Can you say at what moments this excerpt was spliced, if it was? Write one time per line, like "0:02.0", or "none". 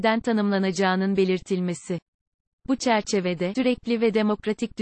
0:03.6